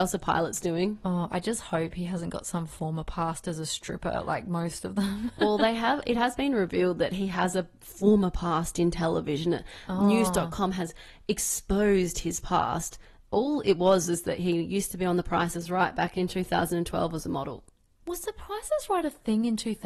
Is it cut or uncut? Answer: uncut